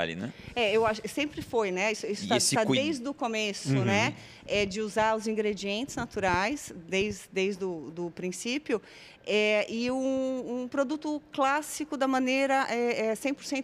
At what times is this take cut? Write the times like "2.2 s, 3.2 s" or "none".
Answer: none